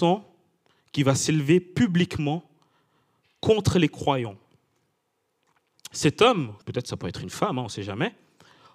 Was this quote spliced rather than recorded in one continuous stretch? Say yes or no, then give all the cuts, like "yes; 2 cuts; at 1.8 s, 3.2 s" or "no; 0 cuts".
yes; 1 cut; at 6.6 s